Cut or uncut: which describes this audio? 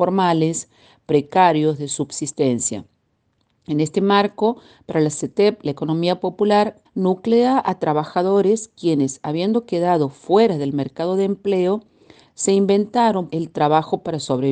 cut